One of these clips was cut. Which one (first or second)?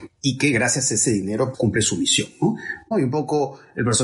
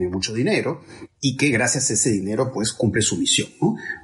first